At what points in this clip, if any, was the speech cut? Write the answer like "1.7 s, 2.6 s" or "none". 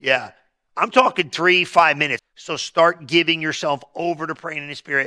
2.2 s